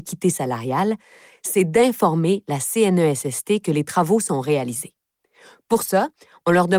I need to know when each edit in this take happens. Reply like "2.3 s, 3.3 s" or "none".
none